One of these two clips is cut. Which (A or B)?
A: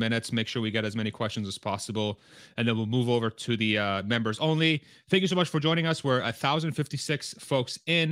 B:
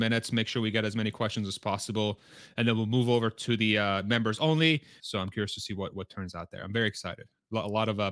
B